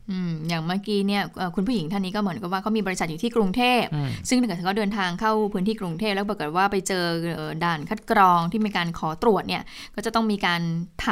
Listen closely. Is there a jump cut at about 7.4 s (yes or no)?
yes